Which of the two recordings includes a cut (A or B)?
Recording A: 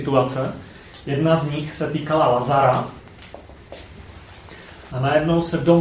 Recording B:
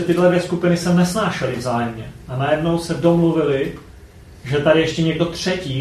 A